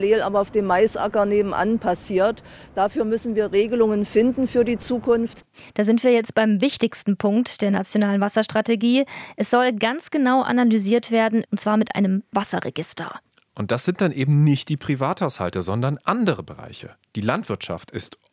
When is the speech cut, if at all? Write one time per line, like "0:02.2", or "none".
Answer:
0:05.7
0:11.5